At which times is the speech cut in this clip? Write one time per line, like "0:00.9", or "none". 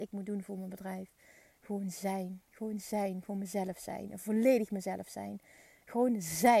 none